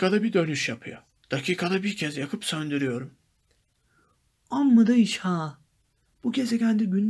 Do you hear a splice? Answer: yes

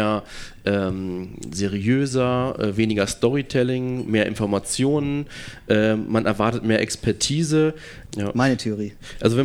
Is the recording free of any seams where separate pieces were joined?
no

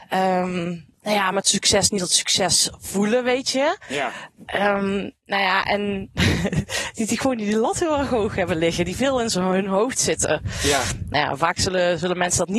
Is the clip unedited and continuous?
no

